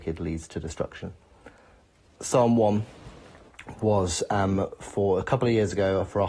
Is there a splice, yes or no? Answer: no